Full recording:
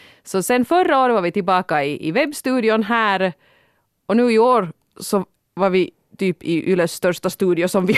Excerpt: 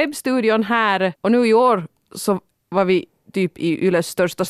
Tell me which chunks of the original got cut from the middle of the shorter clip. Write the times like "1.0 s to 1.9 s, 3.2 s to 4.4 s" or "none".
3.3 s to 4.0 s